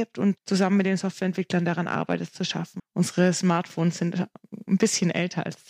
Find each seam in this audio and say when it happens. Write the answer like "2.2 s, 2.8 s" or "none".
2.8 s